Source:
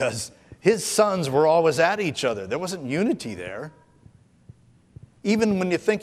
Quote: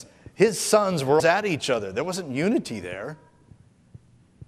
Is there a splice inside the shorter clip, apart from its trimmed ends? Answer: yes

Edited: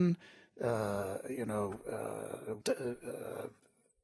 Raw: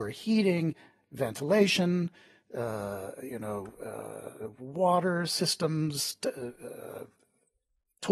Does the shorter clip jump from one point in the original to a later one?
yes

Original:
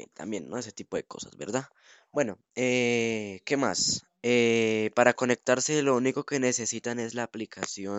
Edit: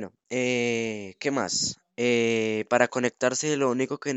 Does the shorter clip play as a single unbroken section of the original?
yes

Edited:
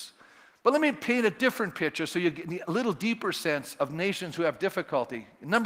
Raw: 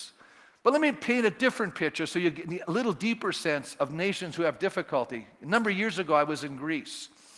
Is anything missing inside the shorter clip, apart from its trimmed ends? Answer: no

